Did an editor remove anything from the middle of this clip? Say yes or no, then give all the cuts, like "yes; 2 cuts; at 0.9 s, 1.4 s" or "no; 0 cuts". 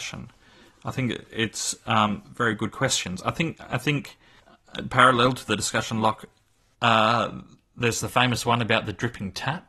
yes; 1 cut; at 6.7 s